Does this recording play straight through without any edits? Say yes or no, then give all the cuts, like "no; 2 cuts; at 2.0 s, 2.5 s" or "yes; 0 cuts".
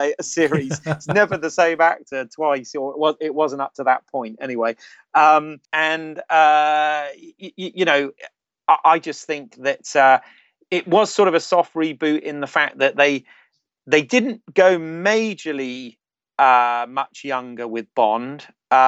no; 1 cut; at 5.6 s